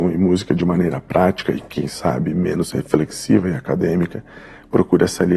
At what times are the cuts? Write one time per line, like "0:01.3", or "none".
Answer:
none